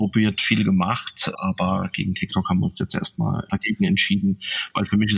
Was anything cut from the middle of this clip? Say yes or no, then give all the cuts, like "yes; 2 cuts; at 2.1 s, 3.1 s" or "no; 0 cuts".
yes; 2 cuts; at 1.3 s, 3.5 s